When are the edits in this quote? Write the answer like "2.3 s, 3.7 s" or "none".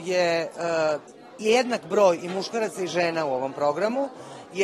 none